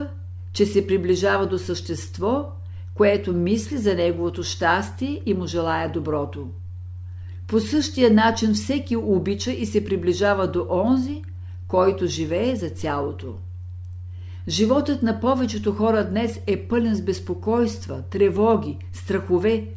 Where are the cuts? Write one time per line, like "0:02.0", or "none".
none

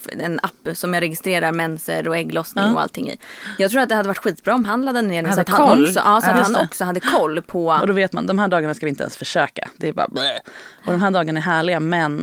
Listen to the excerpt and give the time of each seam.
0:07.8

